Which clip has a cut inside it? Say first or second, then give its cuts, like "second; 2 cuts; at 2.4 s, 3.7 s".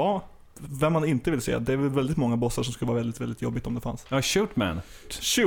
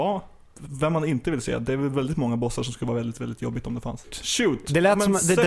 second; 1 cut; at 4.0 s